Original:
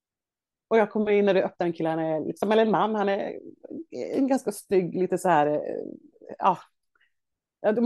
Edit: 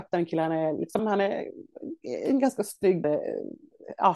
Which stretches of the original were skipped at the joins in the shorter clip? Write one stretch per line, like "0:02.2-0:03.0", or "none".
0:02.5-0:02.9
0:04.9-0:05.5